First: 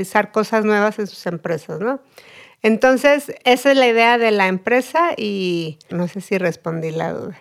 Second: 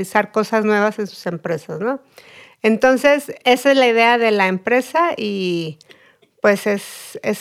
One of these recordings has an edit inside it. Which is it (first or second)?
first